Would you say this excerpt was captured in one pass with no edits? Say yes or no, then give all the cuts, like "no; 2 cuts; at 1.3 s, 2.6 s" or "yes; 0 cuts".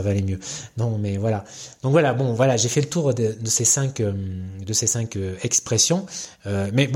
yes; 0 cuts